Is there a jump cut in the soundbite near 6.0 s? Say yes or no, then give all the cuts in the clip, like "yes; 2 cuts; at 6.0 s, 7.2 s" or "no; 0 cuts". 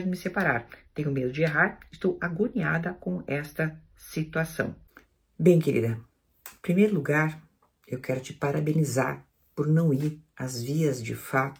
no; 0 cuts